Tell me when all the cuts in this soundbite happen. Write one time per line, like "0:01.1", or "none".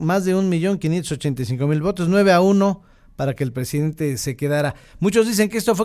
none